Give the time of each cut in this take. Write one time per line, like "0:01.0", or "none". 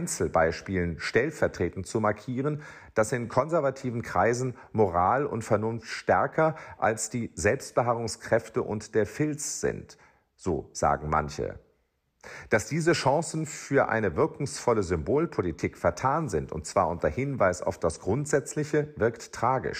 none

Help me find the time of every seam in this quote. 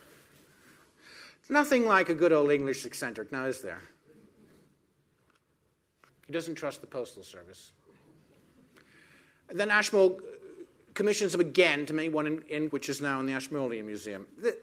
0:06.1
0:12.7

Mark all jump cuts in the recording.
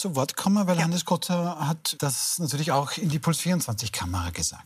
0:02.0

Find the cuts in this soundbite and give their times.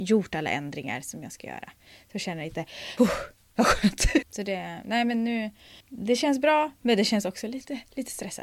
0:03.0
0:04.2
0:05.8

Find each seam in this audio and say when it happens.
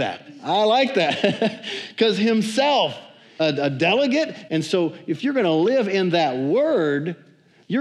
0:03.4
0:04.5

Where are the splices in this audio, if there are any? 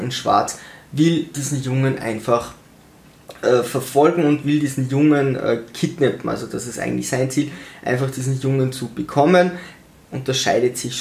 none

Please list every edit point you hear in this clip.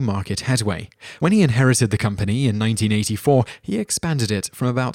none

